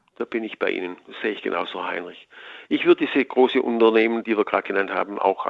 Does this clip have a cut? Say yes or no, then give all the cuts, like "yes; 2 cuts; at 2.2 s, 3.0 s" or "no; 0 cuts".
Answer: yes; 1 cut; at 4.2 s